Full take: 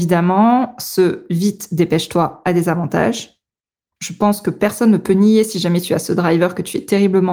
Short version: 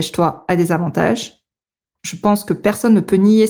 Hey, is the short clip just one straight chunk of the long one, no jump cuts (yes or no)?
yes